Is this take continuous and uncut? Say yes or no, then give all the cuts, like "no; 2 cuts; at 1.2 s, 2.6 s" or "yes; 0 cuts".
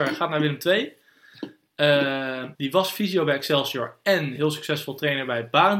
no; 1 cut; at 2.5 s